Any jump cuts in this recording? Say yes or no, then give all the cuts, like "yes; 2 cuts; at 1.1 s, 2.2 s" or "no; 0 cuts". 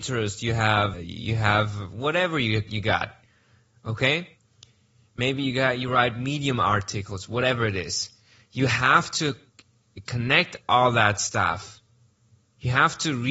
yes; 1 cut; at 0.9 s